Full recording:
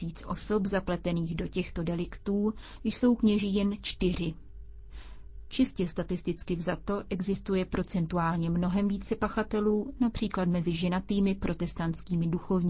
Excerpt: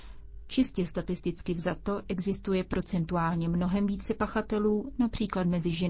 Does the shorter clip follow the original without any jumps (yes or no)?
yes